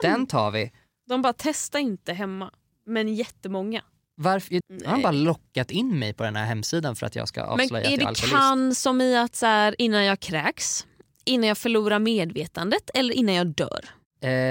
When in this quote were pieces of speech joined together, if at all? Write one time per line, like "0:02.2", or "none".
0:04.6